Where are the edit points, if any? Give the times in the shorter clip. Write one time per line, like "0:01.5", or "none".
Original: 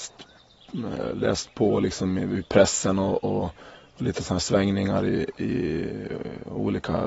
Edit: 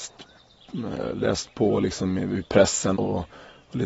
0:03.0